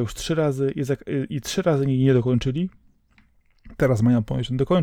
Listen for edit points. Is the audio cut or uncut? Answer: uncut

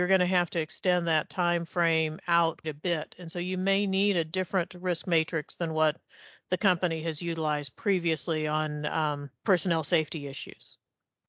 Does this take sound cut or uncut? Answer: cut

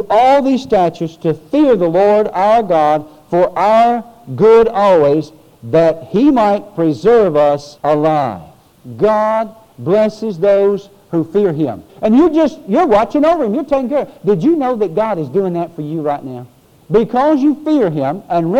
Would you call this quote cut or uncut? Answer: cut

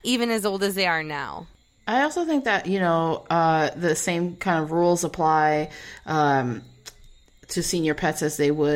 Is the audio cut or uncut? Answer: uncut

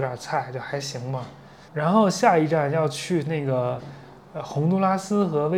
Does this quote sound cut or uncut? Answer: cut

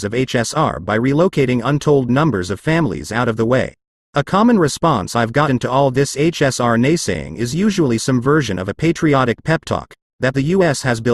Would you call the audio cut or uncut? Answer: cut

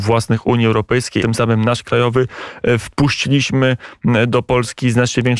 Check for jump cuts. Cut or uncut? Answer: cut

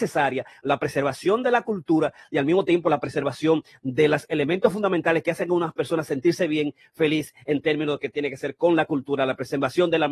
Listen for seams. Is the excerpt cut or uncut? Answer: uncut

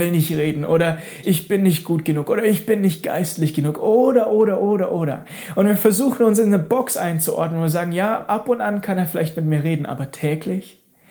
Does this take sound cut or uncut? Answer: cut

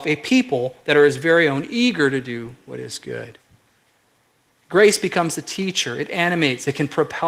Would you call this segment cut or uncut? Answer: uncut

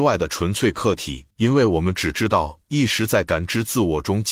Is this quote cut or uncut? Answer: cut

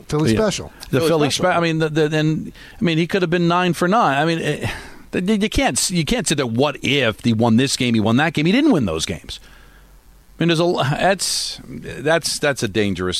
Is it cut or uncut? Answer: uncut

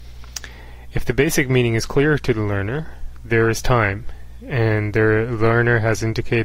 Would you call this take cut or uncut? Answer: uncut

